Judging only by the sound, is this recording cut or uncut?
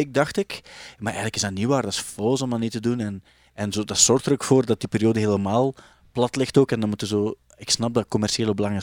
uncut